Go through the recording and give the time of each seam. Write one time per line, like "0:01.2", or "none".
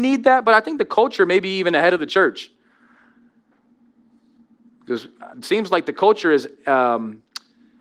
0:05.3